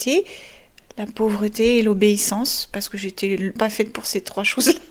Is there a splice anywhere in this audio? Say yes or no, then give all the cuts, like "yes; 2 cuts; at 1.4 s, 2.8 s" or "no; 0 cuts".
yes; 1 cut; at 3.6 s